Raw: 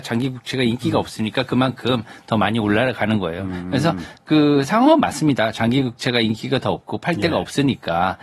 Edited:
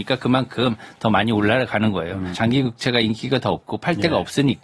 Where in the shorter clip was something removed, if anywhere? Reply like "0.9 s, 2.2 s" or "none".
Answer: 2.3 s